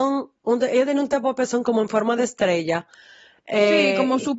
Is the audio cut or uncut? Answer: uncut